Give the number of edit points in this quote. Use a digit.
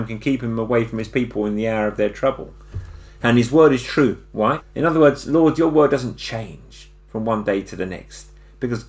2